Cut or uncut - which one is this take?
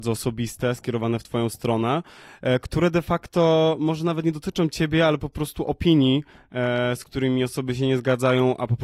uncut